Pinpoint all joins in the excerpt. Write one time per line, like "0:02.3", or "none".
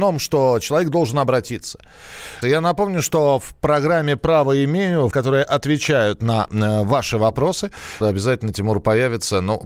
0:02.4
0:05.1
0:08.0